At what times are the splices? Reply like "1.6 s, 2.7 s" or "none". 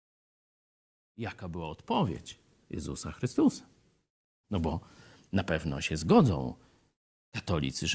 4.3 s